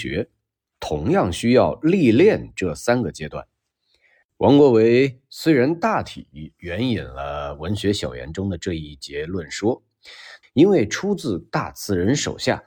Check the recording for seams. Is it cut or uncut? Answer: cut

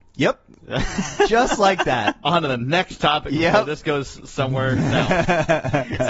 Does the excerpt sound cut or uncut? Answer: uncut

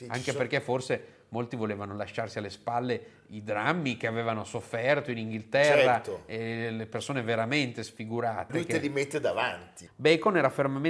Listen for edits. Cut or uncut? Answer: cut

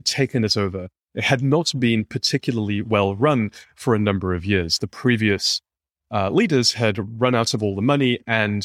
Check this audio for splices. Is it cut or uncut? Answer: uncut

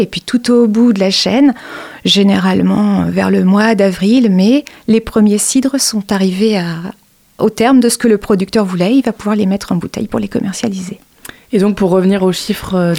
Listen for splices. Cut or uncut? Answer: uncut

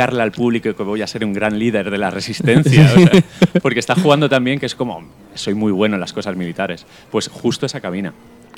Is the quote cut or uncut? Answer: uncut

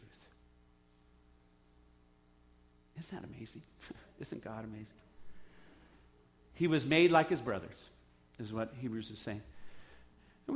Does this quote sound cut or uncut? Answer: uncut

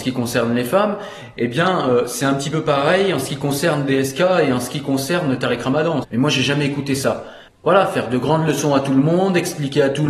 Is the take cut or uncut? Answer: cut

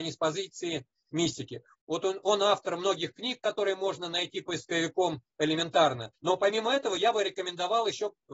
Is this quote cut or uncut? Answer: cut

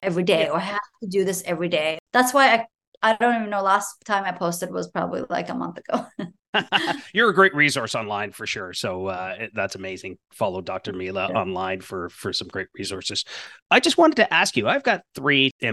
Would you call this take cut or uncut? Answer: uncut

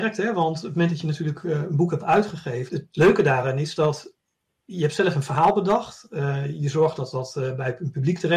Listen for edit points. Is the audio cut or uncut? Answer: cut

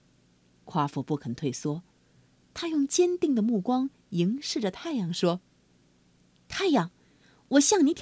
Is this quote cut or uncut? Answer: uncut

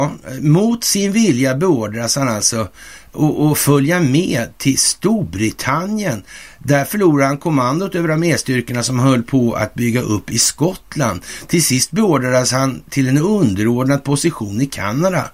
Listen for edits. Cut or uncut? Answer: uncut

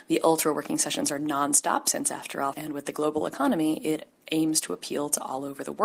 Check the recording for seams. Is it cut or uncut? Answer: cut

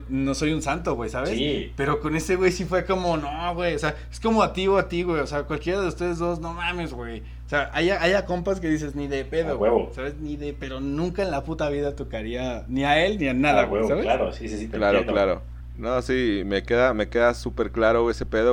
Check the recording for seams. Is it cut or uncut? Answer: uncut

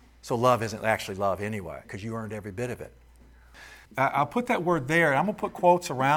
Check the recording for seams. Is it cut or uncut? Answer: cut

